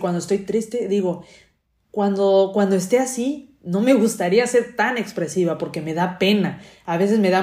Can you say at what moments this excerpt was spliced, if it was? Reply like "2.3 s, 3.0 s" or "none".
none